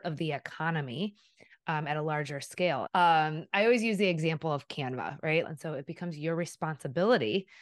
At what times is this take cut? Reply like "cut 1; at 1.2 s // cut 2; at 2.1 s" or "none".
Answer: cut 1; at 2.9 s // cut 2; at 5.4 s